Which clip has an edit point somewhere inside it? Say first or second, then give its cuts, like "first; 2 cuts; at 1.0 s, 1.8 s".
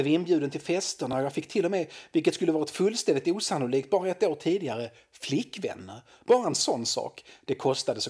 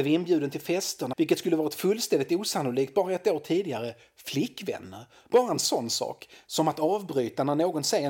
second; 2 cuts; at 1.1 s, 6.5 s